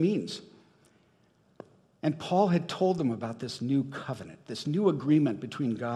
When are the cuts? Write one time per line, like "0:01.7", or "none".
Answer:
none